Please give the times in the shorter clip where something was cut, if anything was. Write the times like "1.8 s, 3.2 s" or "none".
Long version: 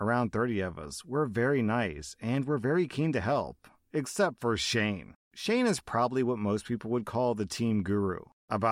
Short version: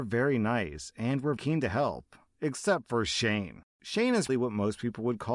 1.4 s, 4.3 s